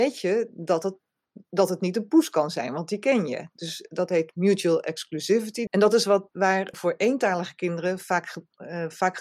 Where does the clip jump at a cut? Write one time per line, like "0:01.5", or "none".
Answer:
0:05.7
0:06.7